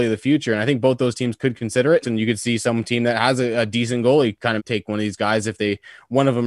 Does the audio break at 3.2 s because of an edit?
no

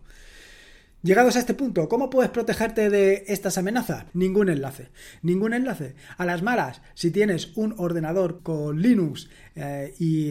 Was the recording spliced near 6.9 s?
no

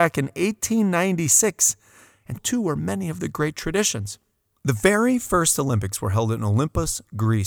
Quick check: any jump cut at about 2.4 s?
yes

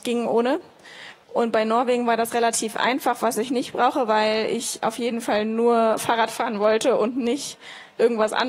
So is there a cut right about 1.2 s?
yes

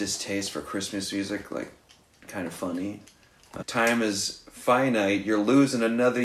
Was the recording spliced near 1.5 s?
no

